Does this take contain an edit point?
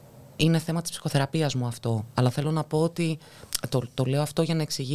no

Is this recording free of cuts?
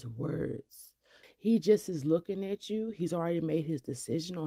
no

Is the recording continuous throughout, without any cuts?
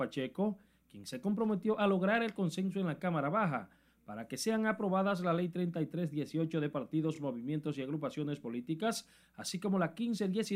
yes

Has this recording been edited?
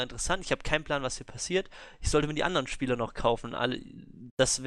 no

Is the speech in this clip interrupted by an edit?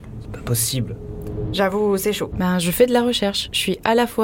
yes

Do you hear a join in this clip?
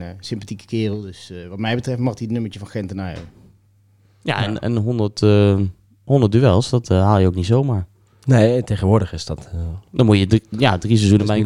no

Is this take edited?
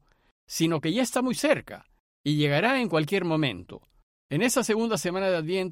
yes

